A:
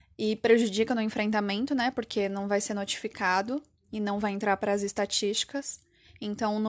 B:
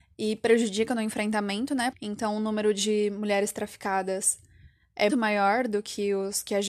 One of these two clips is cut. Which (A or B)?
B